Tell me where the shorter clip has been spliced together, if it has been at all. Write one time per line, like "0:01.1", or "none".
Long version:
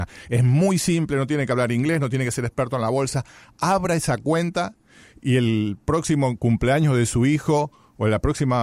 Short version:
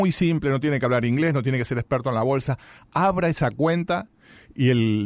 none